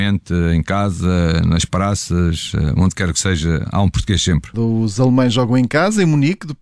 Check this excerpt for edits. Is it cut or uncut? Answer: cut